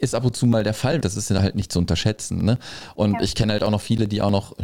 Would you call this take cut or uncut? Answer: cut